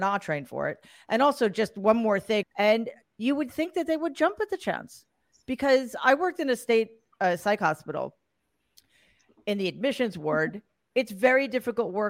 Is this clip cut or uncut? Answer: cut